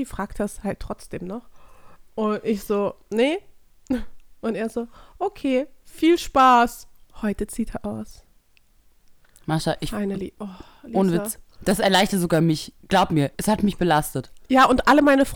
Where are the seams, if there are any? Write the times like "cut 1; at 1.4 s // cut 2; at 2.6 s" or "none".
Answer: cut 1; at 7.0 s // cut 2; at 13.3 s